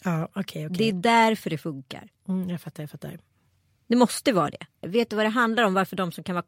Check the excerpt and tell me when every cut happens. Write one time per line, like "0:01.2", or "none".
0:04.8